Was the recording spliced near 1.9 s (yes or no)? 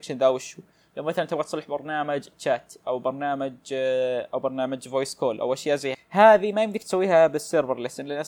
no